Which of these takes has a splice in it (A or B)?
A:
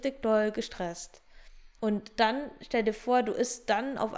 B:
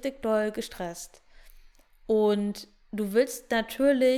A